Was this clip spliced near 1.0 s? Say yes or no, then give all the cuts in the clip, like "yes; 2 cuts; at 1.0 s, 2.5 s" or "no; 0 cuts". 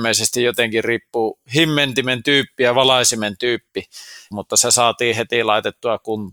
no; 1 cut; at 4.3 s